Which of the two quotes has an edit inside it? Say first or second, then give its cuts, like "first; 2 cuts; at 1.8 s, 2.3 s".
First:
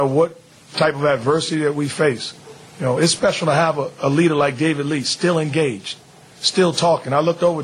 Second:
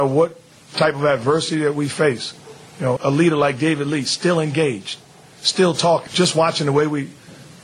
second; 2 cuts; at 3.0 s, 6.1 s